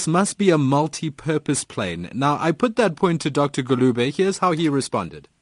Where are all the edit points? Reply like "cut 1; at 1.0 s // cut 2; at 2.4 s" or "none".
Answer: none